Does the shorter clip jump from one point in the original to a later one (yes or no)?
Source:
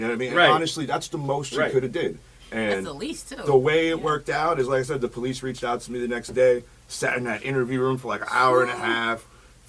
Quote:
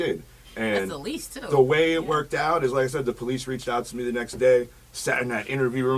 no